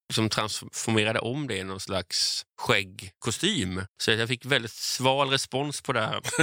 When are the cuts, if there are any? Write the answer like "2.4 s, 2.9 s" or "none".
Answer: 3.9 s